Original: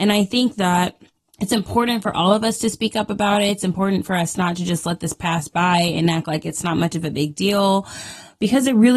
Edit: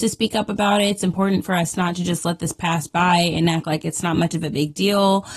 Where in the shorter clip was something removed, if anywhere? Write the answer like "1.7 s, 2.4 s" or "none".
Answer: none

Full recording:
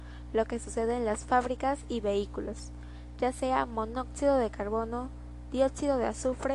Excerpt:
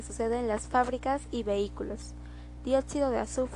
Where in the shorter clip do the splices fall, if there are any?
2.6 s

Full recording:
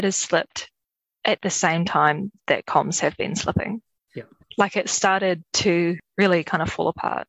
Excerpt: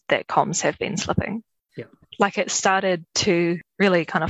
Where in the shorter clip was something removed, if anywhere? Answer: none

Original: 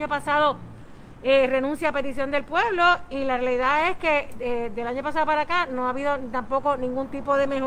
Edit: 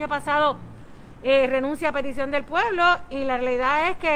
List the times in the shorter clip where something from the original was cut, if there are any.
none

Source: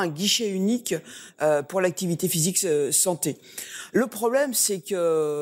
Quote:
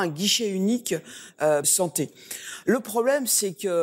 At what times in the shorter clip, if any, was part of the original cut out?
1.6 s

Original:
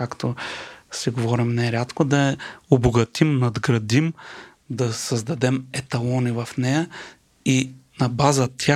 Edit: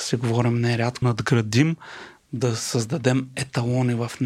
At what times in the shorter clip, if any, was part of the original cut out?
1.0 s

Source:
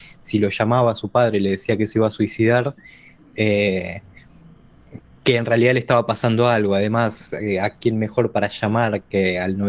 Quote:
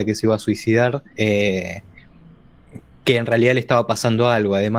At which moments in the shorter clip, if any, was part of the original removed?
1.1 s

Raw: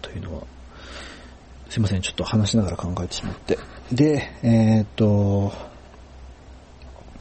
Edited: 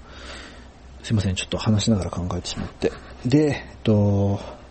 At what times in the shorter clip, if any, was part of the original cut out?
3.7 s

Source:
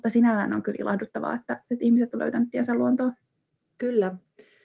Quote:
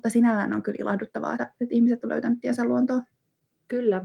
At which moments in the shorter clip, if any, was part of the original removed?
1.4 s

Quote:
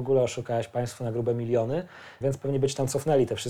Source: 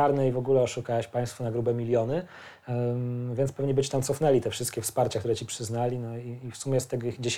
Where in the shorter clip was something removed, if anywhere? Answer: 2.2 s

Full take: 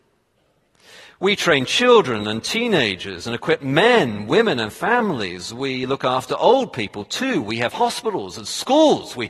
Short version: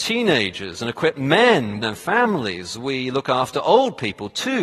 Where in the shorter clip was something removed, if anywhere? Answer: 1.8 s

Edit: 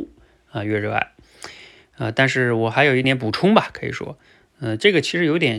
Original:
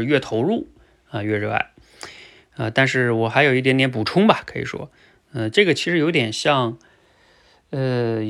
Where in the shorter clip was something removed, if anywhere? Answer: 3.0 s

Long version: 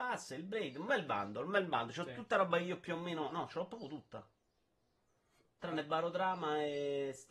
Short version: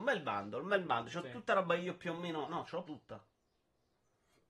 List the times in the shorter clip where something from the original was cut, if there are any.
2.9 s

